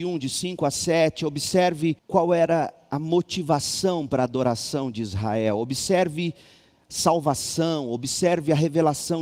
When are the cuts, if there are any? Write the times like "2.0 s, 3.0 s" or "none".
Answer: 2.0 s